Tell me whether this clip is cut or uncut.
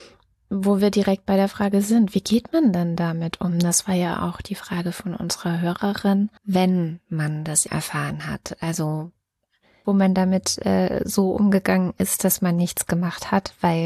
cut